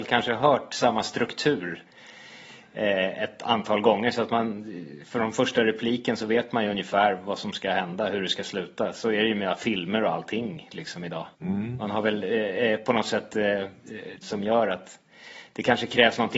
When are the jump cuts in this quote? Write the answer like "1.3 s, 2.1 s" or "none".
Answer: 11.3 s, 14.2 s